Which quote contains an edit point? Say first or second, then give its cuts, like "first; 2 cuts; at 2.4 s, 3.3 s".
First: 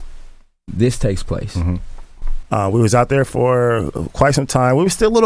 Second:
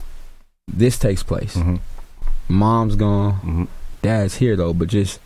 first; 1 cut; at 2.4 s